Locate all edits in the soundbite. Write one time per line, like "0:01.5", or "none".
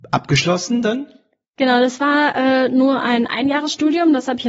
none